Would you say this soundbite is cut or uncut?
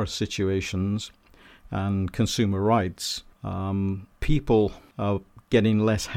uncut